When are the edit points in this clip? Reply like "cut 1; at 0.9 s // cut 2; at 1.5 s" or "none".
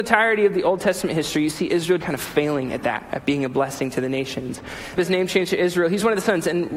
cut 1; at 2.0 s // cut 2; at 5.0 s